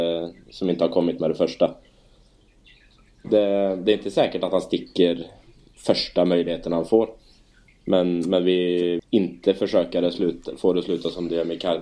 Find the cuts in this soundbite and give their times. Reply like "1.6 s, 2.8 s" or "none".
9.0 s